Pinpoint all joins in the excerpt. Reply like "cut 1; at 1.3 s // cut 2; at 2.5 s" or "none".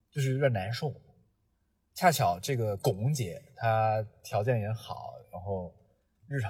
none